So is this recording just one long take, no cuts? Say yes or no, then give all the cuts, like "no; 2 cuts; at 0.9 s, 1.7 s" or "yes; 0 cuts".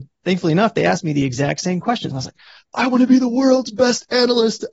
no; 1 cut; at 2.1 s